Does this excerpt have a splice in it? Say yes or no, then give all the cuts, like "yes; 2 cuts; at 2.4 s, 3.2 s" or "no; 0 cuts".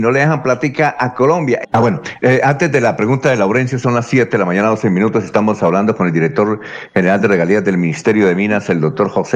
yes; 1 cut; at 1.6 s